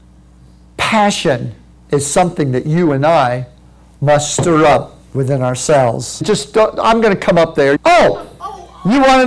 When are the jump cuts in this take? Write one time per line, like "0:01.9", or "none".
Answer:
0:06.2
0:07.8